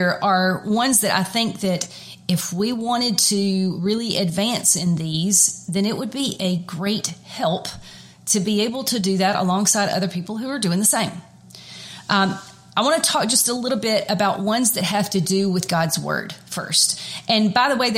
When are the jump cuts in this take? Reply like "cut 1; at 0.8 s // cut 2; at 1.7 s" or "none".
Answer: none

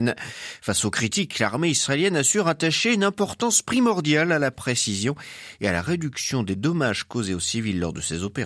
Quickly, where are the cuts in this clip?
none

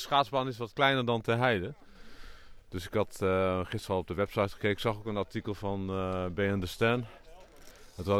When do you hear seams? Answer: none

